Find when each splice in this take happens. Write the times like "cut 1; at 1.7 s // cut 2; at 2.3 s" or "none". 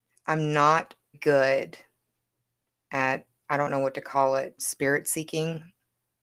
cut 1; at 1.1 s // cut 2; at 4.6 s